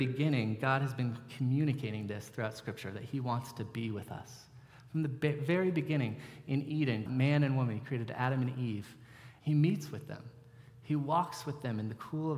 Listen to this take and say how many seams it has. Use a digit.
2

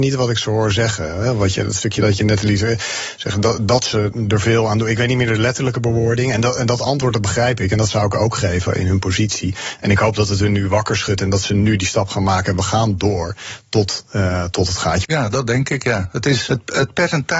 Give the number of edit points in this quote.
2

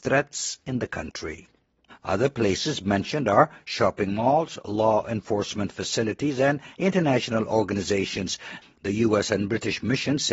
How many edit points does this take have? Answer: 2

